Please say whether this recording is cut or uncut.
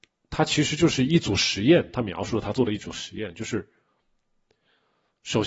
uncut